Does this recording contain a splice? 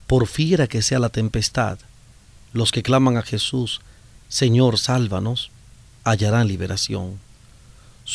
no; 0 cuts

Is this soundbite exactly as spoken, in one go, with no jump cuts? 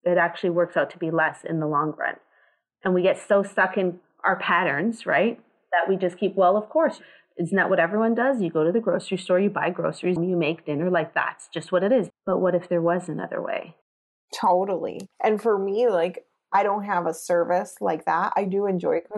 no; 3 cuts; at 10.2 s, 12.1 s, 15.1 s

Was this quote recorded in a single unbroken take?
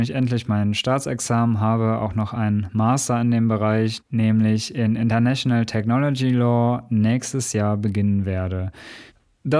yes; 0 cuts

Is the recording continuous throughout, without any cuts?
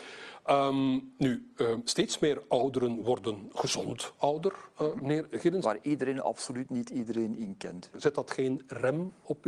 no; 2 cuts; at 5.6 s, 7.9 s

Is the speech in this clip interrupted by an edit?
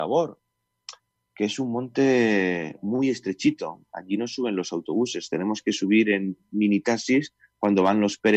no; 0 cuts

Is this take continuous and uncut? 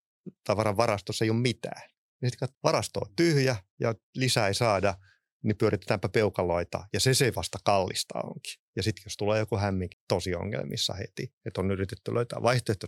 no; 3 cuts; at 2.5 s, 8.7 s, 9.9 s

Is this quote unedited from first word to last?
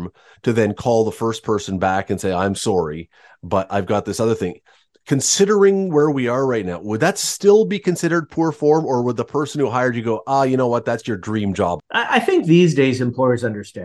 no; 1 cut; at 11.8 s

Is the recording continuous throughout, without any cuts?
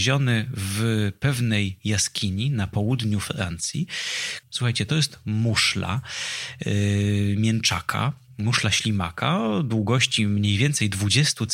no; 1 cut; at 4.4 s

